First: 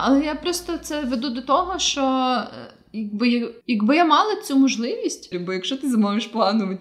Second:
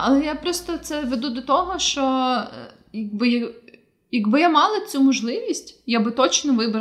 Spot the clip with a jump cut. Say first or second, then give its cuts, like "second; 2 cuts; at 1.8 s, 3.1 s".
first; 2 cuts; at 3.6 s, 5.3 s